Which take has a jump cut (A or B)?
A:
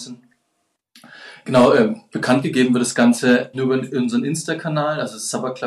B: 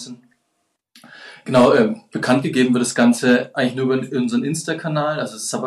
A